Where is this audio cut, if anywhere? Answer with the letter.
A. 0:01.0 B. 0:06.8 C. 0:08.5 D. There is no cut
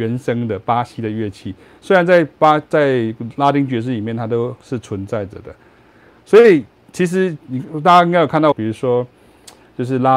C